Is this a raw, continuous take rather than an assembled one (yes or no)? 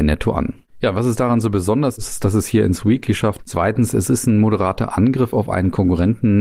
no